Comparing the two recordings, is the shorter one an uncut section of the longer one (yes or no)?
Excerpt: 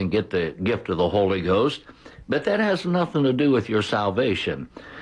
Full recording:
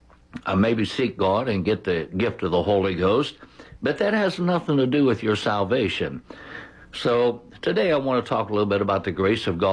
yes